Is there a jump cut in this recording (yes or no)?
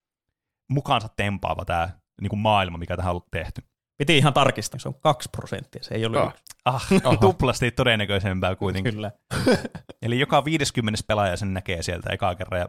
yes